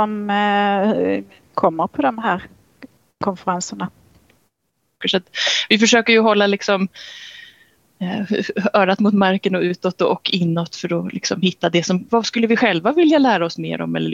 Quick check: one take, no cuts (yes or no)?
no